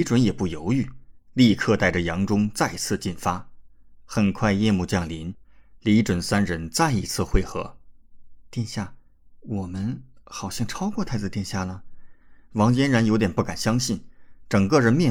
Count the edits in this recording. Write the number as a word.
one